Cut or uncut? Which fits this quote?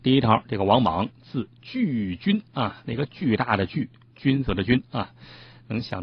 cut